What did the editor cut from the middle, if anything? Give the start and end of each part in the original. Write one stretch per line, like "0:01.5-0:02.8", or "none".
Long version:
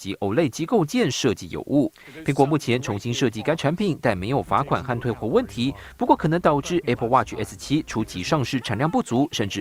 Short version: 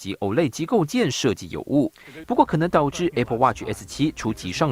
0:02.2-0:05.9